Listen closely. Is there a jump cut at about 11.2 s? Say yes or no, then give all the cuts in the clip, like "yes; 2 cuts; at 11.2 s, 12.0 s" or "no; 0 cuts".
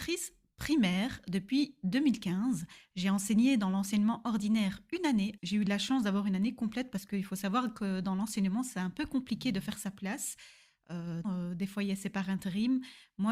yes; 2 cuts; at 5.4 s, 11.2 s